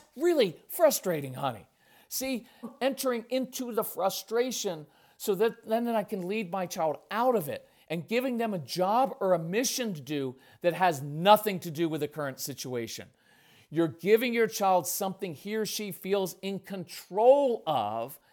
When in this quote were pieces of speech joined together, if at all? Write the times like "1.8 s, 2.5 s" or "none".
2.6 s